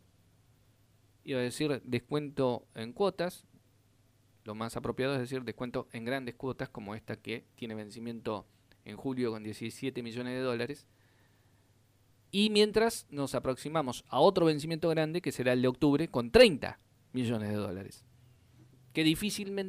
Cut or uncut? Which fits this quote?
uncut